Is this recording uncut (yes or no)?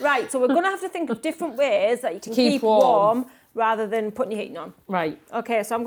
yes